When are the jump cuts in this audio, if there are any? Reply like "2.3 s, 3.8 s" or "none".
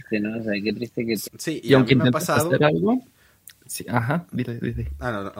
1.2 s